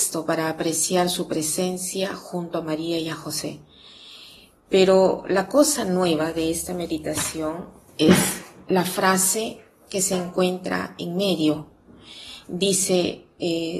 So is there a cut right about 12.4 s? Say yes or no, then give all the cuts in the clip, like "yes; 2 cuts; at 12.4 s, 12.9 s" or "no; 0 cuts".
no; 0 cuts